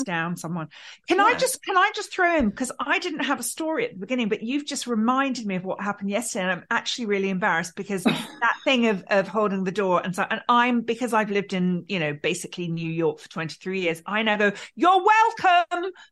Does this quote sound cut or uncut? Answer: uncut